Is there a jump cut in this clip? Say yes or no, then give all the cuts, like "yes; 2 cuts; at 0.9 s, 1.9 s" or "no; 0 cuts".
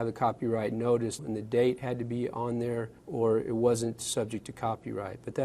yes; 2 cuts; at 1.2 s, 3.0 s